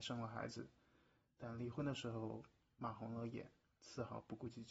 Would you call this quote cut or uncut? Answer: uncut